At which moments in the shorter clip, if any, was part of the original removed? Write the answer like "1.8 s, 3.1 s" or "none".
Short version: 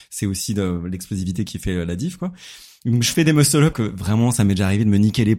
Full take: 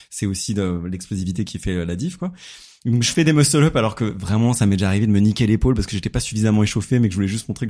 3.7 s